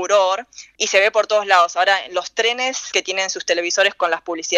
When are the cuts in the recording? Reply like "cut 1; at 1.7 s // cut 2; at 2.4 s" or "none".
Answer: none